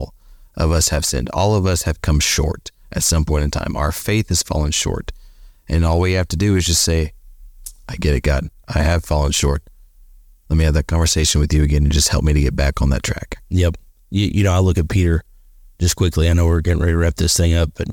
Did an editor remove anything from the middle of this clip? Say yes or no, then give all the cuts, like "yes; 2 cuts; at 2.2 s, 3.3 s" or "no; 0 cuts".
no; 0 cuts